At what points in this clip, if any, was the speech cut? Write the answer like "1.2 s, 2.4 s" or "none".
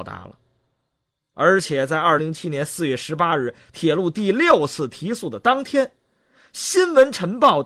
2.2 s